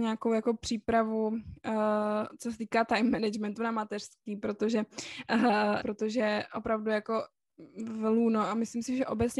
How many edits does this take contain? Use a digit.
1